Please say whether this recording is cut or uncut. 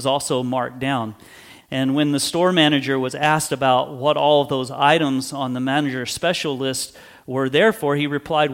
cut